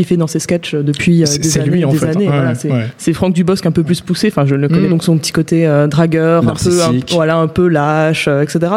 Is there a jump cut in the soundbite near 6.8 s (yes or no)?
no